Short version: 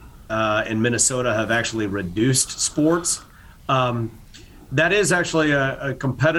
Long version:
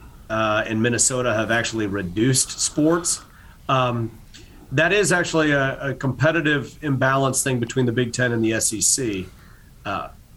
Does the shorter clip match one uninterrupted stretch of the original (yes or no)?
yes